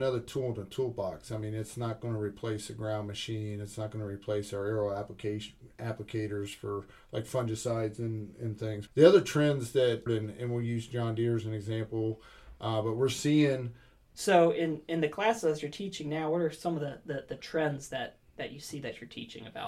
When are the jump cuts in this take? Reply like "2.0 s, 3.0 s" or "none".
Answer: 8.9 s, 10.1 s, 14.0 s